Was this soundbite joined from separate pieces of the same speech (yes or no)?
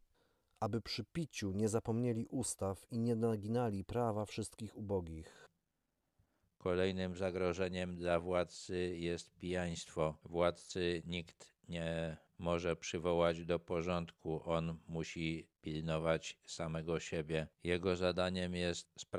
no